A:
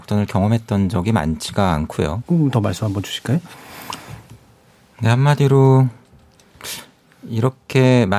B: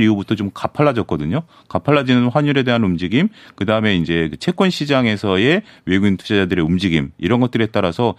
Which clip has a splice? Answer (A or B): A